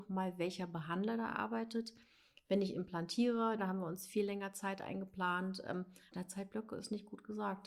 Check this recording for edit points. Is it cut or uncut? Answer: cut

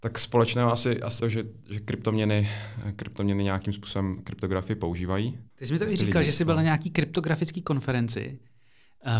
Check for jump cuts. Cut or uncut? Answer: cut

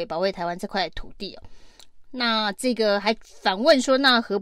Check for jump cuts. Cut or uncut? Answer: uncut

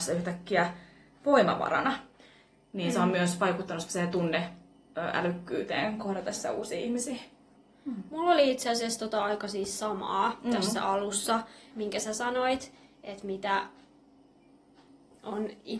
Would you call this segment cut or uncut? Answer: cut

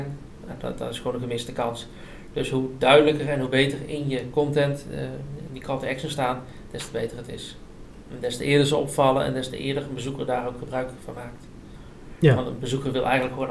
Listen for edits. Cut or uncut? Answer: uncut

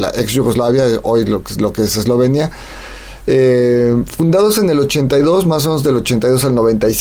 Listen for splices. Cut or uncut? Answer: uncut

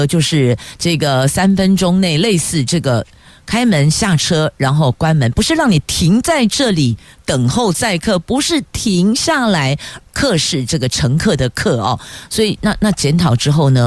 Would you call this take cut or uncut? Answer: cut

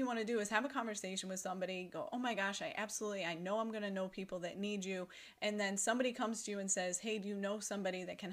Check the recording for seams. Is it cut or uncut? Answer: uncut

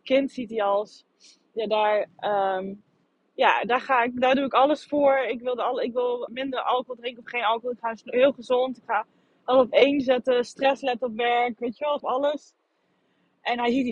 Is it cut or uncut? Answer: cut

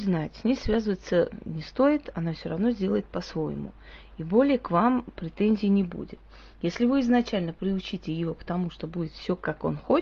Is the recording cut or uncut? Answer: uncut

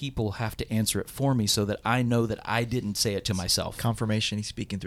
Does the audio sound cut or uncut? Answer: uncut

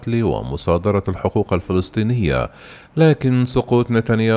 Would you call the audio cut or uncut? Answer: cut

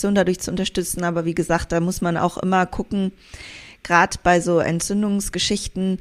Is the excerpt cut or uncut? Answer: uncut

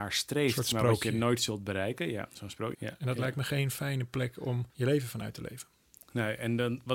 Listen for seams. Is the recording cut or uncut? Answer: cut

